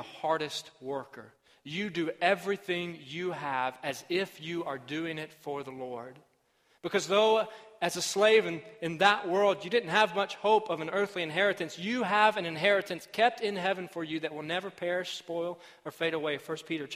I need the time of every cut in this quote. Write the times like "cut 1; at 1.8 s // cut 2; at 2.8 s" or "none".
none